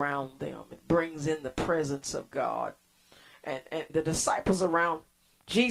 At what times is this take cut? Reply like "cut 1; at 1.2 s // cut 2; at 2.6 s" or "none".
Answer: cut 1; at 3.9 s